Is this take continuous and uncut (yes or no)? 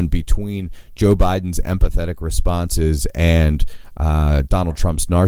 yes